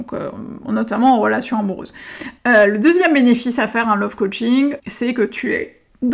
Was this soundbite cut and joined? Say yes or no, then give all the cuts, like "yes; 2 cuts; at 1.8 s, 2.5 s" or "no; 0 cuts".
yes; 2 cuts; at 2.4 s, 4.8 s